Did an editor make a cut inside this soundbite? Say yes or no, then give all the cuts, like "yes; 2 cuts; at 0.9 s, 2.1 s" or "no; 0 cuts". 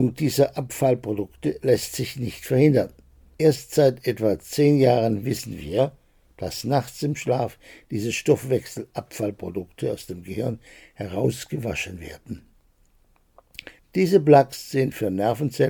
yes; 2 cuts; at 3.4 s, 13.8 s